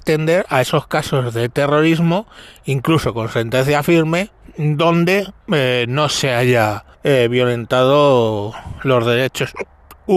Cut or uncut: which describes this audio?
cut